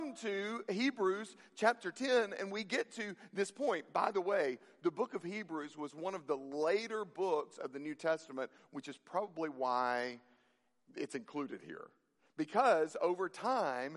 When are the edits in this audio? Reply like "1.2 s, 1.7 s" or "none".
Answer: none